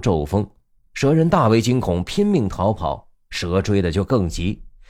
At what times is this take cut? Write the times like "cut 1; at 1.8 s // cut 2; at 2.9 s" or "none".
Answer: none